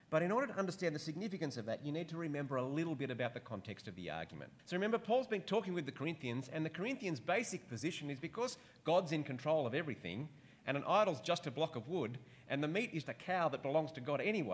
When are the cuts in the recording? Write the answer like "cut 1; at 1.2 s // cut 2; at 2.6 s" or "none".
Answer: cut 1; at 4.6 s // cut 2; at 13.0 s